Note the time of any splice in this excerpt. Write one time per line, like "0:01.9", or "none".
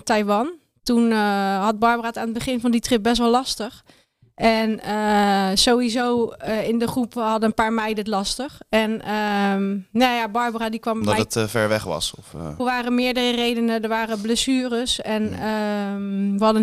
0:12.6